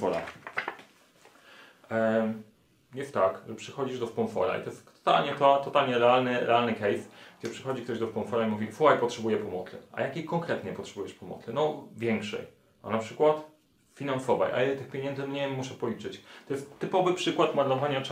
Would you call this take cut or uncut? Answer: uncut